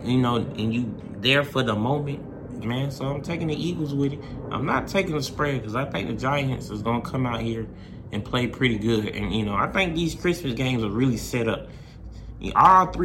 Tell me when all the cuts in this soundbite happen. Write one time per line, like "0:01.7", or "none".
0:02.6